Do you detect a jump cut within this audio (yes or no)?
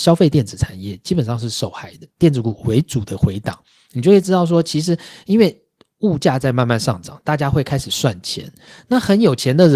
yes